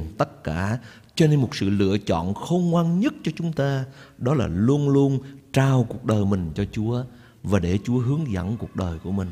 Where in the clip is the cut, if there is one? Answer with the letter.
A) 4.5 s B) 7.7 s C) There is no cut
C